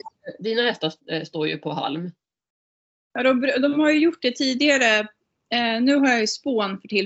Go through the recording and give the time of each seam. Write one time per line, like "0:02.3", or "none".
none